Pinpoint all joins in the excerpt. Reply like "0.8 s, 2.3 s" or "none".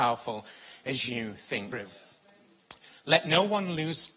1.7 s